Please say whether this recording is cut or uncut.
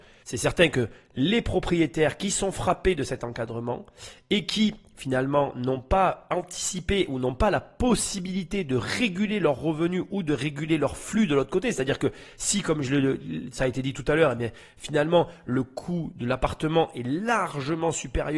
uncut